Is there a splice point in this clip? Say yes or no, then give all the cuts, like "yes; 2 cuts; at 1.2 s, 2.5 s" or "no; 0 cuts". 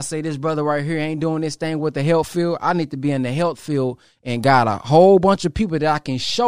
no; 0 cuts